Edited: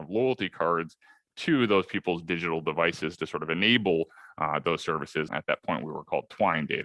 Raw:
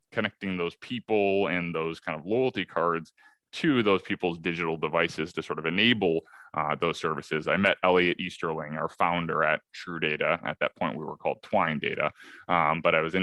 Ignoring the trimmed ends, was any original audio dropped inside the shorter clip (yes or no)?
yes